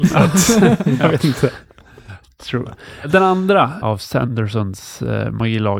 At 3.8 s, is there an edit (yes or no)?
yes